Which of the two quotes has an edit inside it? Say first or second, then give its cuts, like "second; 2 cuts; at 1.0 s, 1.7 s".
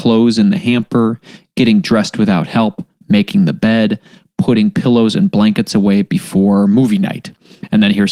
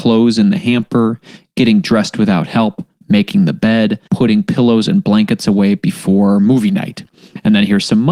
second; 1 cut; at 4.0 s